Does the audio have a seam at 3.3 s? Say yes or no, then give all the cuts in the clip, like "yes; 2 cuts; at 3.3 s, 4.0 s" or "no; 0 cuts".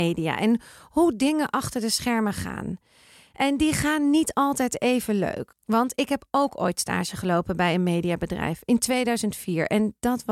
no; 1 cut; at 5.5 s